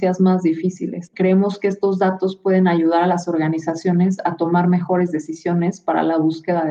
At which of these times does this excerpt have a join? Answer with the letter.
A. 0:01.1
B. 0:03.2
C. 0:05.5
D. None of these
A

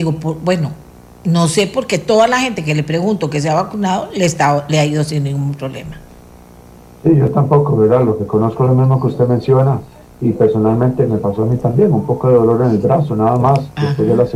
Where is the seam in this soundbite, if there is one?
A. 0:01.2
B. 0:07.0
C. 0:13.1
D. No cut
D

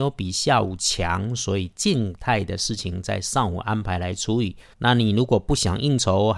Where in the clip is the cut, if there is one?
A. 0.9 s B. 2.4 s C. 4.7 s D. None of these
C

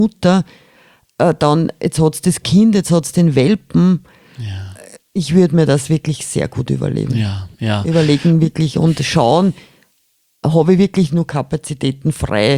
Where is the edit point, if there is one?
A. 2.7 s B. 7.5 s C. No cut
B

